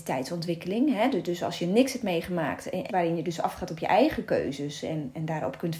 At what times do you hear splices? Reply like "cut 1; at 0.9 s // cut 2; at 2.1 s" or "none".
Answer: cut 1; at 2.9 s